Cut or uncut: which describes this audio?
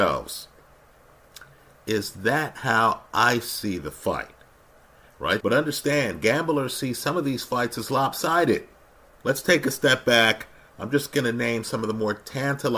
cut